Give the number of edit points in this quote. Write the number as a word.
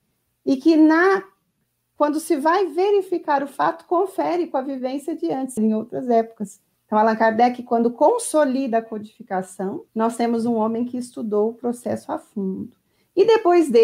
three